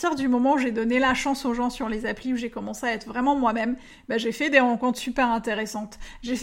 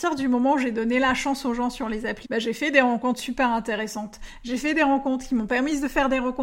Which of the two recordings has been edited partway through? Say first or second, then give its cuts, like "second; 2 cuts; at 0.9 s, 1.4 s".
second; 1 cut; at 2.2 s